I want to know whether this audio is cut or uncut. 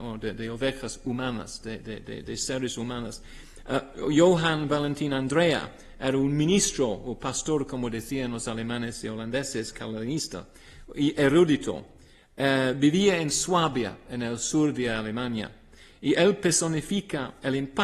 uncut